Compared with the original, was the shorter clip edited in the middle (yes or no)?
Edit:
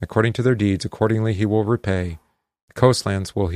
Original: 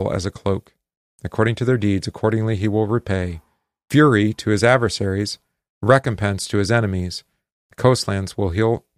yes